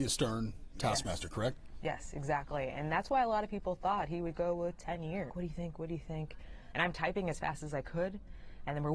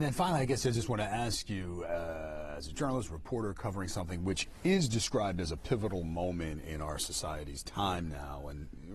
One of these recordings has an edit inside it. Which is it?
first; 2 cuts; at 5.3 s, 6.7 s

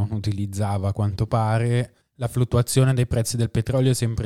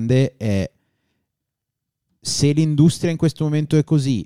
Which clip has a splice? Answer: first; 1 cut; at 2.0 s

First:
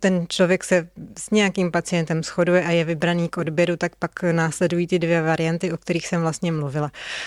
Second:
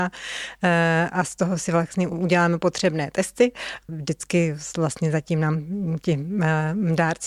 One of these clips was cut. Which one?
second; 1 cut; at 3.9 s

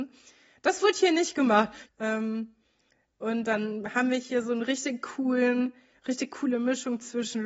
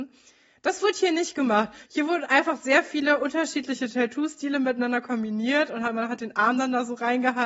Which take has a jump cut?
first; 1 cut; at 1.9 s

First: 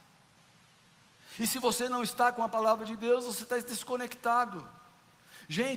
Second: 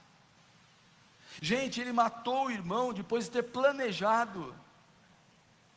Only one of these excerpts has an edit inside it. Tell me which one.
second; 1 cut; at 1.4 s

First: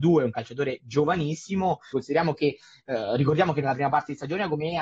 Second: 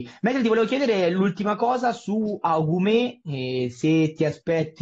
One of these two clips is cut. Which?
first; 1 cut; at 1.9 s

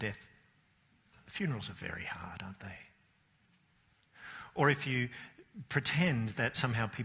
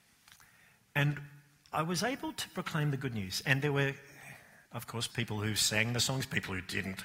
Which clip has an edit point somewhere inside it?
second; 1 cut; at 5.1 s

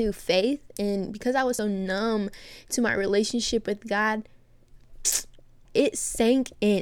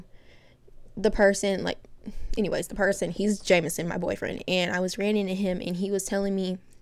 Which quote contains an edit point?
first; 2 cuts; at 1.6 s, 5.7 s

